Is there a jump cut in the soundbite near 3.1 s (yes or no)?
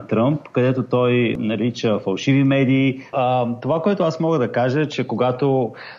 yes